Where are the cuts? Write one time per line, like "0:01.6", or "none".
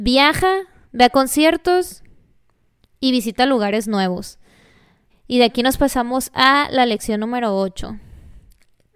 0:05.1